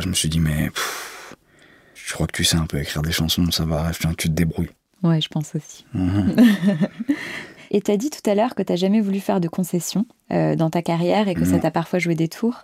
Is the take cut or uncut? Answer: uncut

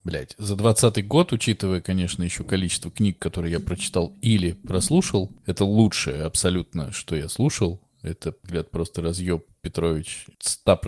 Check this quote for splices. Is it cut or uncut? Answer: uncut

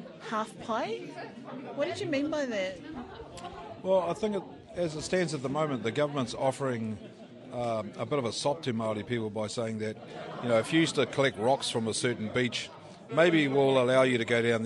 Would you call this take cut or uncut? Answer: cut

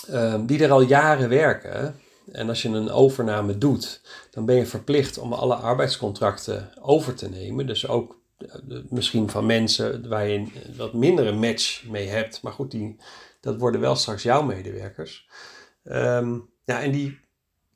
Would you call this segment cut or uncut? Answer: uncut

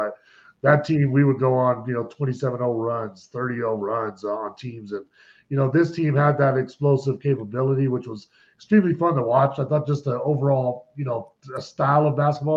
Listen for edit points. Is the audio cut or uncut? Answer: uncut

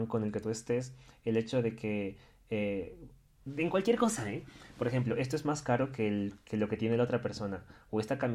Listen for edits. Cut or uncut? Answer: uncut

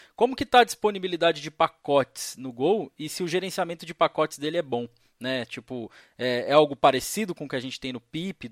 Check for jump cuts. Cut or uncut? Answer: uncut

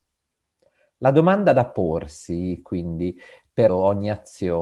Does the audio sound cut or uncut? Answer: cut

